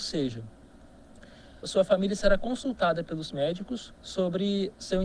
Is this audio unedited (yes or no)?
no